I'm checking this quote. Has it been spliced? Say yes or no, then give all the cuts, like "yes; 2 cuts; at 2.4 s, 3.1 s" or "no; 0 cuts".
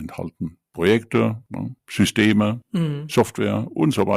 no; 0 cuts